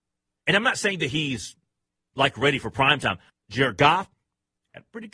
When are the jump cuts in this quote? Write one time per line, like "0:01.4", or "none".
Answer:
0:03.3